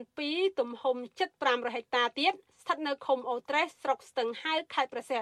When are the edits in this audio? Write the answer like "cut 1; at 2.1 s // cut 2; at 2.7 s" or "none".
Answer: none